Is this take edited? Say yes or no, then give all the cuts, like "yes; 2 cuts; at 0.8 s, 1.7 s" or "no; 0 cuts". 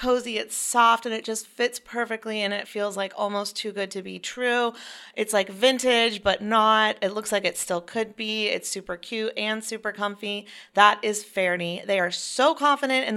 no; 0 cuts